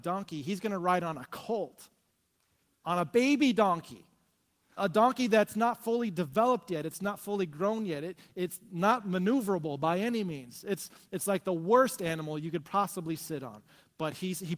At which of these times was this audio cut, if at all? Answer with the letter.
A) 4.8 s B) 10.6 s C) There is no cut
A